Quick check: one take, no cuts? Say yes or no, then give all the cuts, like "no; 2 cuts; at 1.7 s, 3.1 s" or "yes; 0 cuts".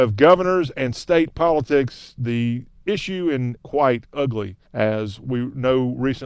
no; 2 cuts; at 3.6 s, 4.7 s